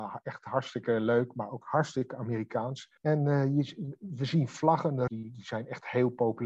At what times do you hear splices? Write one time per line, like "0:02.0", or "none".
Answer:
0:03.0
0:05.1